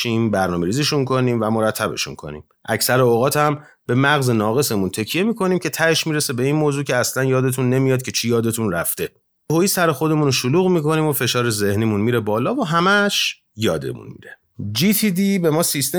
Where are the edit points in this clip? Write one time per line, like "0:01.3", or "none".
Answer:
none